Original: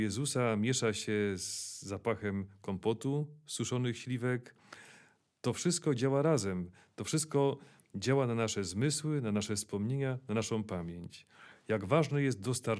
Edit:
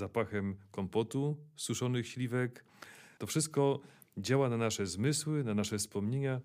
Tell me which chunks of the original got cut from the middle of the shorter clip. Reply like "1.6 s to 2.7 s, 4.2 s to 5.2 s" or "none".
5.1 s to 6.9 s